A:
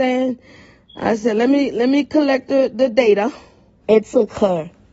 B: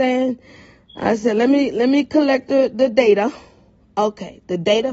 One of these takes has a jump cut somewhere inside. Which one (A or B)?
A